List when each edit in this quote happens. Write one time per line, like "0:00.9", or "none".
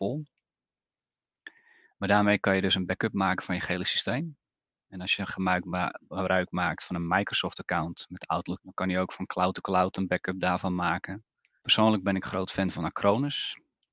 0:08.6
0:11.6